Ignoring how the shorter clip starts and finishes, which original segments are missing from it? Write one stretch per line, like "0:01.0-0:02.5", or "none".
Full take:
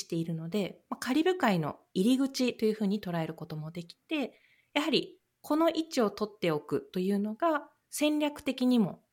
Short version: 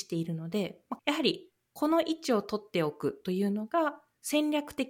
0:01.0-0:04.7